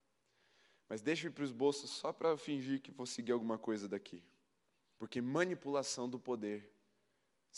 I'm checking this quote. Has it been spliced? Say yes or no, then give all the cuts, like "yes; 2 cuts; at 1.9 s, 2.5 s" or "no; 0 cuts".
yes; 1 cut; at 5.0 s